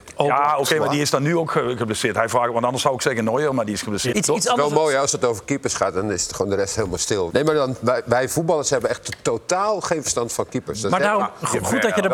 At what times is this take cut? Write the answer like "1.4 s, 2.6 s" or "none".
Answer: 4.1 s, 7.3 s